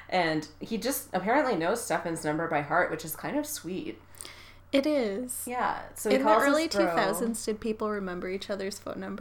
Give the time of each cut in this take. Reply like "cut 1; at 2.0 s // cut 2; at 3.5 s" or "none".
none

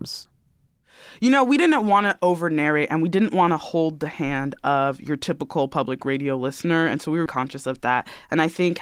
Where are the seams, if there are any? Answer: cut 1; at 7.3 s

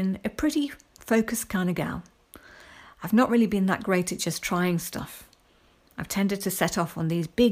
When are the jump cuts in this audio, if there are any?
none

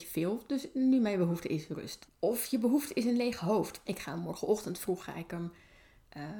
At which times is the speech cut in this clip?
cut 1; at 2.1 s // cut 2; at 3.8 s

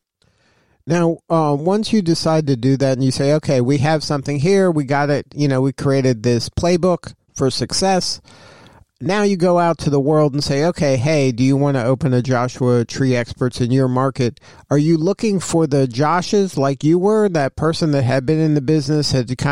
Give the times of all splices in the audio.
none

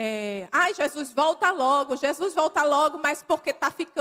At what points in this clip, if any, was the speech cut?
none

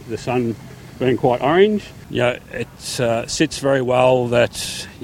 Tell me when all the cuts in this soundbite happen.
cut 1; at 2.0 s

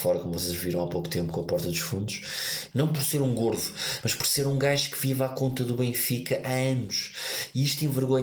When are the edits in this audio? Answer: cut 1; at 2.7 s

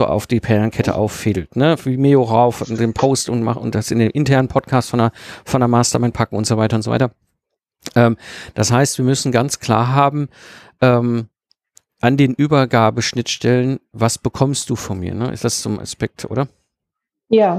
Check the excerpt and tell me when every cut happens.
cut 1; at 1.8 s

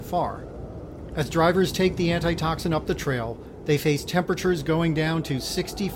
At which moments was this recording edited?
cut 1; at 1.1 s

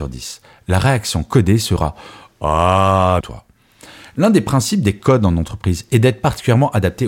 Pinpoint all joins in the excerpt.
cut 1; at 3.2 s

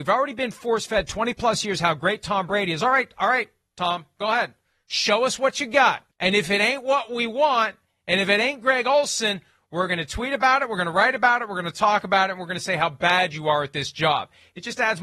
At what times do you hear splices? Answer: cut 1; at 6.1 s

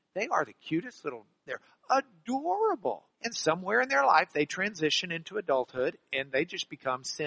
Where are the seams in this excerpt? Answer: cut 1; at 1.5 s // cut 2; at 3.1 s

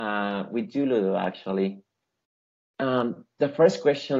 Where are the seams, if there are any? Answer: none

